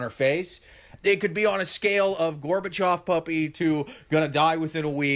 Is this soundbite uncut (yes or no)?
no